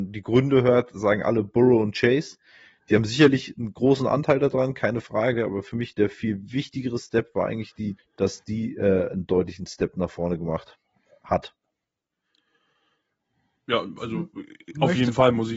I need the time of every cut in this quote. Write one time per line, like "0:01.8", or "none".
0:08.0

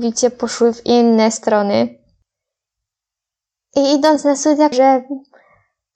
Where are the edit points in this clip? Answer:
0:04.7

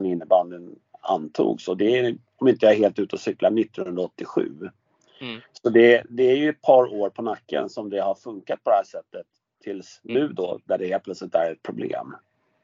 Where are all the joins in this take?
none

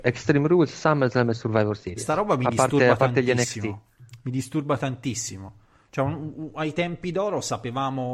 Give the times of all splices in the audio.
none

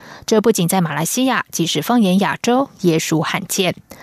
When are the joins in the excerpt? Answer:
none

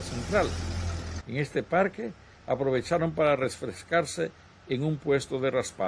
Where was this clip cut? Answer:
0:01.2

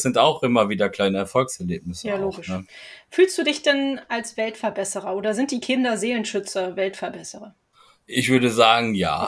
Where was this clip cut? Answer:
none

